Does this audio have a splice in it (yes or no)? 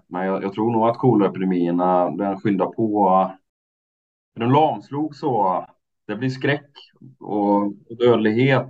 no